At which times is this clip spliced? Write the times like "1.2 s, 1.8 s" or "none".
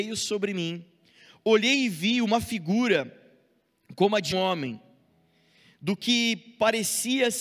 4.3 s